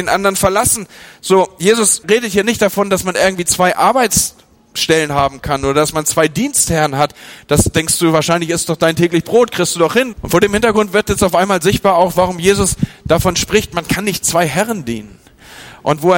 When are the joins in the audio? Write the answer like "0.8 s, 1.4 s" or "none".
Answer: 2.0 s, 10.1 s